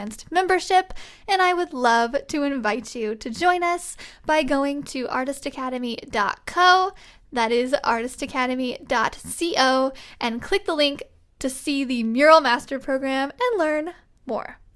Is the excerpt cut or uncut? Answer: uncut